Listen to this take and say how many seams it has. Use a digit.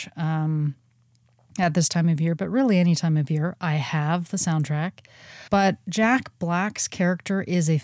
1